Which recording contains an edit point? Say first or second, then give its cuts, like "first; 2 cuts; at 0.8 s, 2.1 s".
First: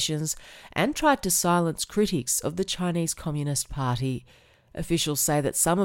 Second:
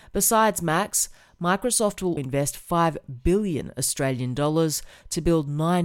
second; 1 cut; at 2.2 s